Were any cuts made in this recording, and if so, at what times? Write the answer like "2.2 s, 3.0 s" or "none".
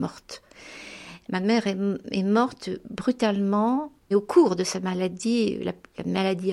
1.2 s